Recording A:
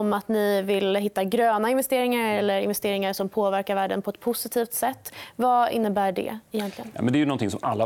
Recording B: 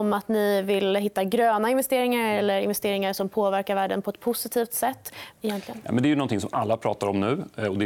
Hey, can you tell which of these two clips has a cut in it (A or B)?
B